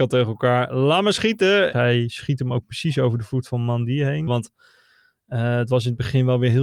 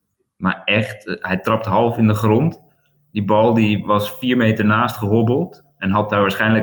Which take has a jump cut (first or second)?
first